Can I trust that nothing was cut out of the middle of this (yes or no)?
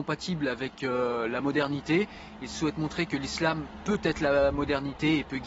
yes